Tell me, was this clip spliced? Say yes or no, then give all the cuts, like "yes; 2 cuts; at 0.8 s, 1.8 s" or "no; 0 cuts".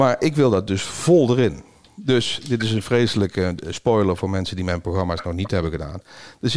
no; 0 cuts